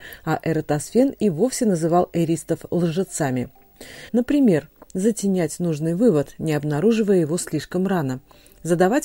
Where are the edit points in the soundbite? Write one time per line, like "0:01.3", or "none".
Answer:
0:04.1